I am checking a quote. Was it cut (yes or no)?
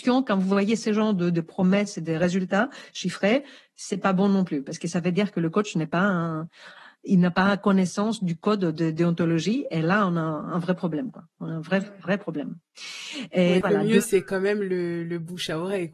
yes